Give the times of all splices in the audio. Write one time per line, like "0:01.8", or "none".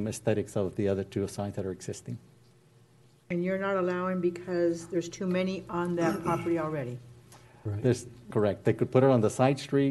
0:08.3